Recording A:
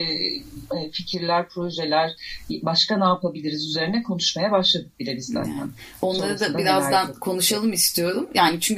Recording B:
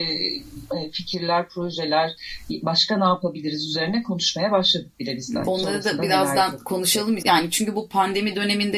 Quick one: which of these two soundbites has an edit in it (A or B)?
B